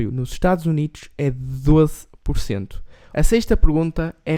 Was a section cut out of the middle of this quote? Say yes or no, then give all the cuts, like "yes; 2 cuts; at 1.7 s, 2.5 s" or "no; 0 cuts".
yes; 1 cut; at 3.1 s